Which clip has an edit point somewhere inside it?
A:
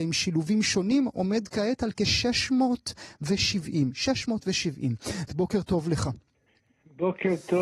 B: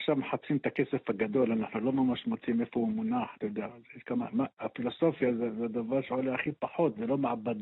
A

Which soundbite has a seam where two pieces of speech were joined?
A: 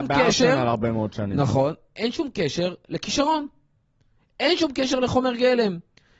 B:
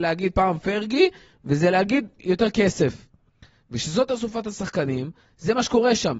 B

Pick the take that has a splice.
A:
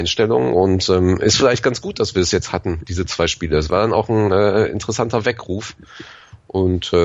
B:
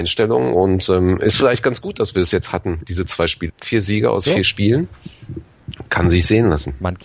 B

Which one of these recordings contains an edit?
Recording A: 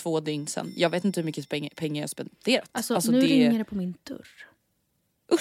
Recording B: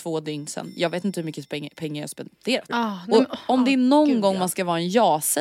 B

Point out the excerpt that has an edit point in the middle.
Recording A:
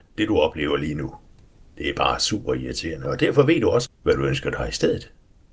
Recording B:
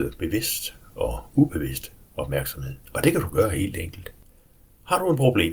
B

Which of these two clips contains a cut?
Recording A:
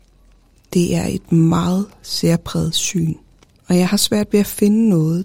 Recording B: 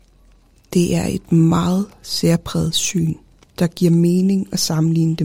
B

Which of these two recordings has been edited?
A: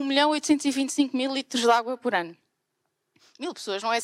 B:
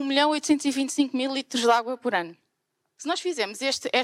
B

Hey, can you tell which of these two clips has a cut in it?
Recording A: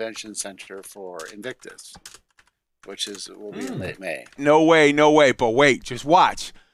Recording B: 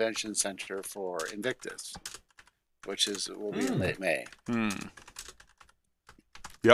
A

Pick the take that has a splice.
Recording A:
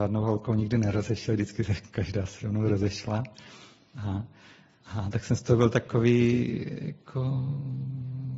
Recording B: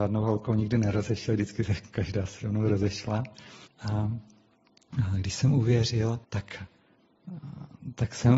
B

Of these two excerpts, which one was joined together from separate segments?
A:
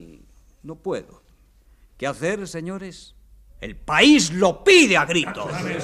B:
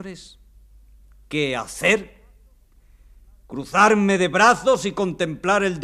A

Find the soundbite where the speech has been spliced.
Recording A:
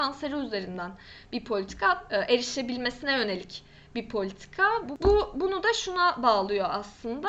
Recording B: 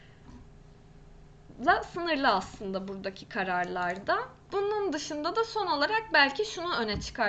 A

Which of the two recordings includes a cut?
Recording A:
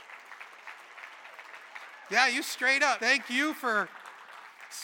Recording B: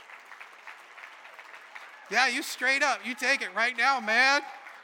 A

